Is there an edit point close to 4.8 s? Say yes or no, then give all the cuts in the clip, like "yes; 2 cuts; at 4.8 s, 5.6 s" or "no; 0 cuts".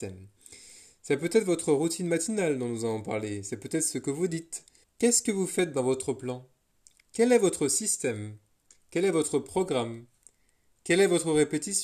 yes; 1 cut; at 4.8 s